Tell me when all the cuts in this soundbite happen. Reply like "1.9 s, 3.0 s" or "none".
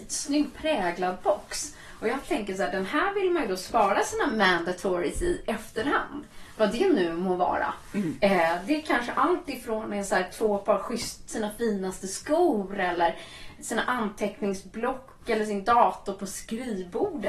none

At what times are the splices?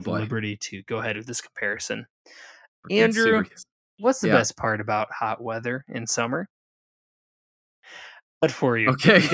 8.4 s

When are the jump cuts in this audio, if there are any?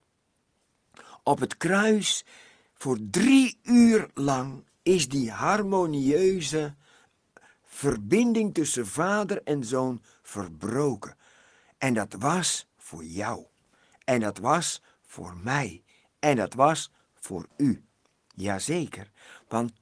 none

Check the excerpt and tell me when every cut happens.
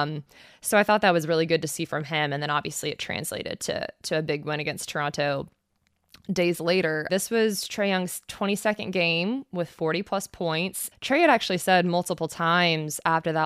7.1 s, 10.9 s

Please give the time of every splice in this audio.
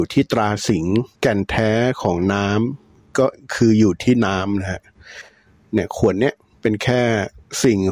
1.1 s

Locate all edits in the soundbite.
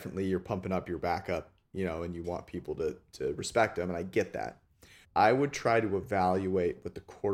5.0 s

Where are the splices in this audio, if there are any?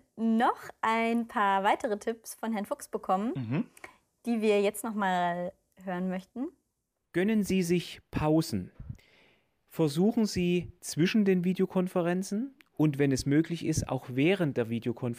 10.8 s

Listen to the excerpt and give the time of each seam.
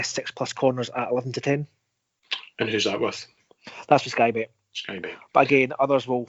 none

